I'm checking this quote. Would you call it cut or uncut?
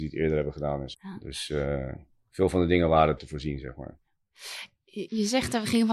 cut